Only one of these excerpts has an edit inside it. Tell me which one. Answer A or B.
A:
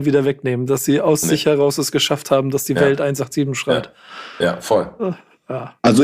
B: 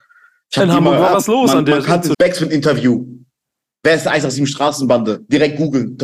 B